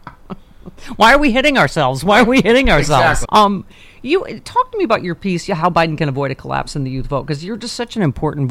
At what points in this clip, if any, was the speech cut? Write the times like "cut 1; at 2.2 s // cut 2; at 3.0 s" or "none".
cut 1; at 3.2 s

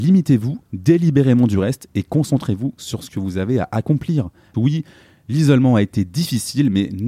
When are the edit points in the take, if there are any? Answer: cut 1; at 4.5 s

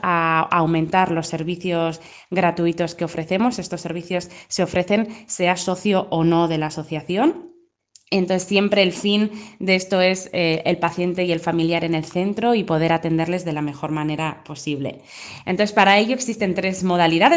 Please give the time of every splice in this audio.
none

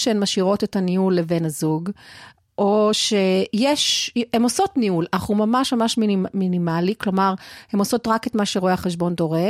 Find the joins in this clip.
none

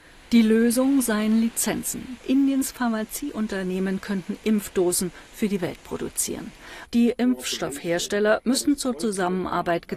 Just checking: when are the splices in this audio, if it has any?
cut 1; at 2.2 s // cut 2; at 6.9 s

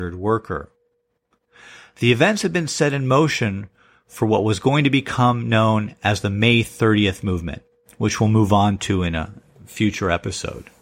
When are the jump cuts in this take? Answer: none

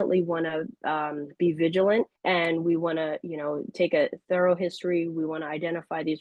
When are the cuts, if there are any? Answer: cut 1; at 2.2 s

